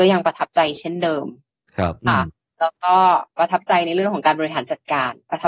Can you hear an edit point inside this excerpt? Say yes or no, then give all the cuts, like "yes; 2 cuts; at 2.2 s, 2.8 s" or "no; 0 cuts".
yes; 1 cut; at 2.0 s